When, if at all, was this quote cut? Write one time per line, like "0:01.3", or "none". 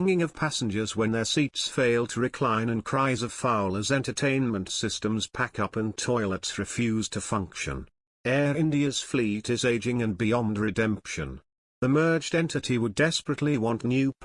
none